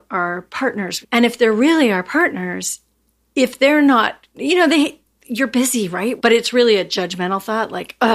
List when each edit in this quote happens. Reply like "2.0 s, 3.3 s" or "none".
1.0 s, 6.2 s